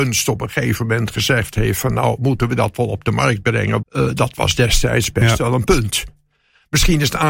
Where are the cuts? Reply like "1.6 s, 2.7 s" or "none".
3.8 s